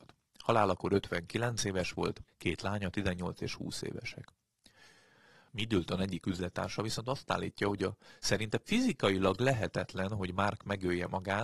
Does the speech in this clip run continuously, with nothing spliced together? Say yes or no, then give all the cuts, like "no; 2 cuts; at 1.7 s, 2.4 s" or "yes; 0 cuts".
no; 2 cuts; at 2.3 s, 5.5 s